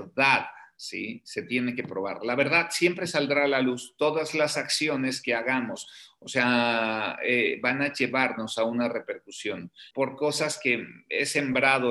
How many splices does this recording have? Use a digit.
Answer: 1